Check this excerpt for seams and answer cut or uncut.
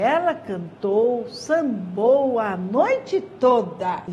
uncut